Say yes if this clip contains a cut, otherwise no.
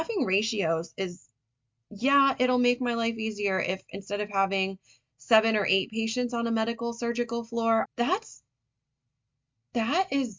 yes